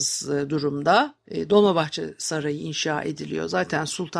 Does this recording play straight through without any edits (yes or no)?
yes